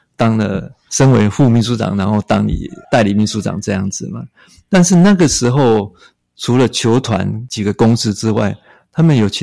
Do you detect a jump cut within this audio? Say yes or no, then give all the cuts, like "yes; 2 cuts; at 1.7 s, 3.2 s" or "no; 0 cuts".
yes; 1 cut; at 2.8 s